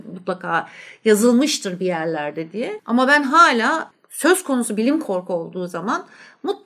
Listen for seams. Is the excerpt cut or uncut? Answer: cut